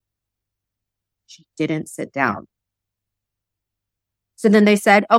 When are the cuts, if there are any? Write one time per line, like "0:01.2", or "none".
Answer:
none